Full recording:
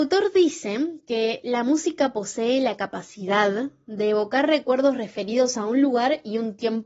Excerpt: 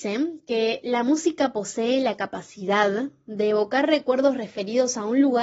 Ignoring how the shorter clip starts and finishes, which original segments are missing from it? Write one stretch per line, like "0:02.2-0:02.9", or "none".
none